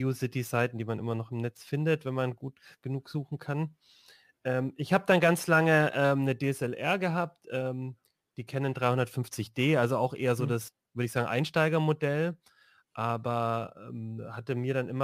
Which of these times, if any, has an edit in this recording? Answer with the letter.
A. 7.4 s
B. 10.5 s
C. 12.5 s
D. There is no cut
D